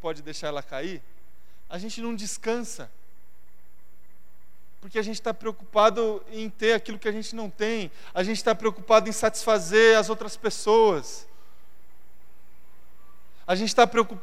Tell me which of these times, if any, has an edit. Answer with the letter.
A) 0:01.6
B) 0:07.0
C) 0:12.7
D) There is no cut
A